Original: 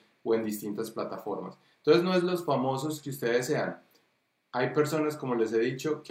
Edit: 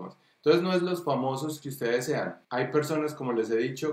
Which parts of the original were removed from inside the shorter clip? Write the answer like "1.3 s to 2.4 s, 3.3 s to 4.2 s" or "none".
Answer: 3.9 s to 4.5 s

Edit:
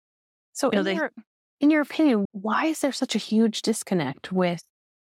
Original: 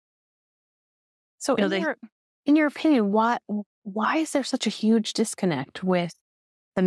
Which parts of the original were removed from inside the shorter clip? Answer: 3.1 s to 3.8 s

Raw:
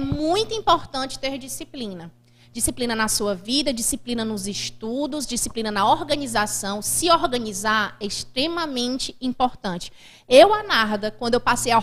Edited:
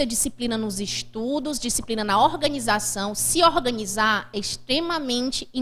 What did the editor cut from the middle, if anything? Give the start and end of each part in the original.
none

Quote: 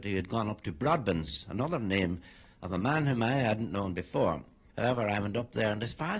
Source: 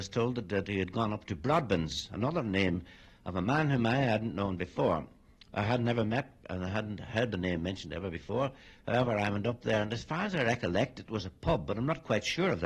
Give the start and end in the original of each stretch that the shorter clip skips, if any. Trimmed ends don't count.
5.3 s to 8.8 s

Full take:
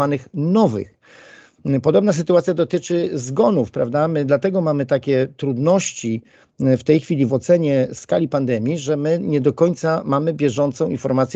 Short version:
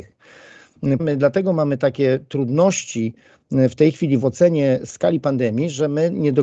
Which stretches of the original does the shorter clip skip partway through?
1.8 s to 4.1 s

